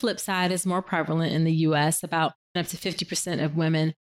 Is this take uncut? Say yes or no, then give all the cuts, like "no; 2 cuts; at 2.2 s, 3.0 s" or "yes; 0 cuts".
no; 1 cut; at 2.6 s